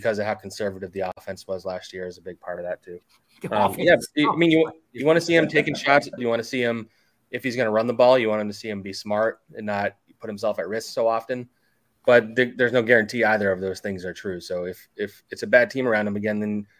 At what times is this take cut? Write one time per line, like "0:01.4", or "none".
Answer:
0:06.2
0:11.9